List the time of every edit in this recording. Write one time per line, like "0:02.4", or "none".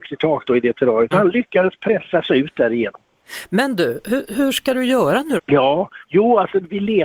0:01.1
0:05.4